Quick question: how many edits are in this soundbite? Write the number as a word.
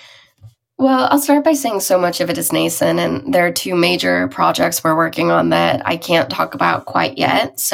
zero